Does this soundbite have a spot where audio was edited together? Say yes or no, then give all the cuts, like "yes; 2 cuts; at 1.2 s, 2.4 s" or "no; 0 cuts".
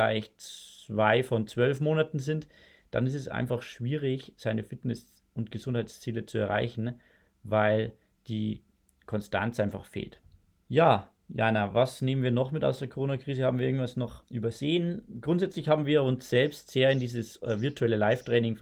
yes; 2 cuts; at 10.6 s, 14.2 s